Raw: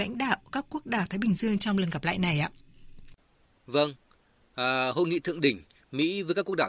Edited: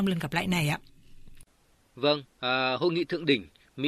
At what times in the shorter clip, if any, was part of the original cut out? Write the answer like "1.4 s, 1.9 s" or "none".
2.3 s